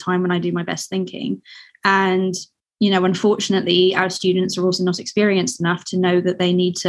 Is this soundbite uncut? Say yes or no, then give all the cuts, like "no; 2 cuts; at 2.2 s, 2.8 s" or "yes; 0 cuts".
yes; 0 cuts